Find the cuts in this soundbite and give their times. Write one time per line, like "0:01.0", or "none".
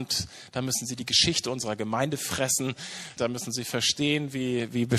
0:03.2